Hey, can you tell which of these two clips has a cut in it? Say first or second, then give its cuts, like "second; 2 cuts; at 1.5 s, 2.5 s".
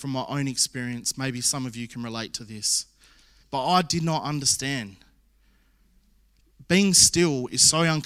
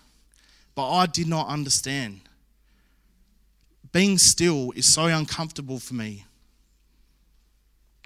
first; 1 cut; at 3.4 s